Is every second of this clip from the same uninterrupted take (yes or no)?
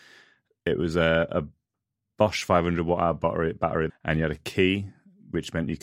no